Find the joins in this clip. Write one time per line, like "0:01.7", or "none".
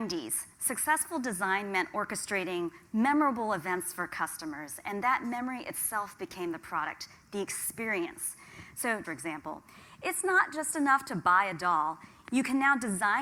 0:09.0
0:12.2